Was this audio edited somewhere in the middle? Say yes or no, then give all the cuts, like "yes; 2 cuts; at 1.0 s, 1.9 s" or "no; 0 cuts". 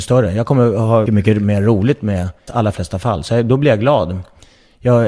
yes; 2 cuts; at 1.1 s, 2.5 s